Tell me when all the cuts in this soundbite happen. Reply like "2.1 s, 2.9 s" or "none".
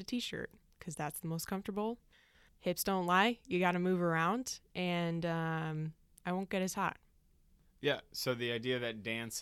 none